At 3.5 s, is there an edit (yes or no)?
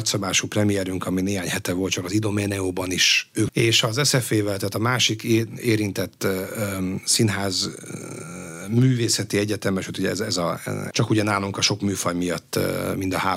yes